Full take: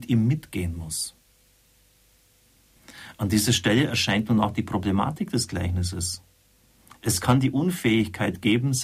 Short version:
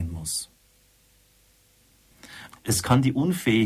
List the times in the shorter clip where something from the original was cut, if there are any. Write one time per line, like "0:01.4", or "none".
0:02.5